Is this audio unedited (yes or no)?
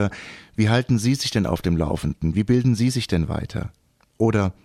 yes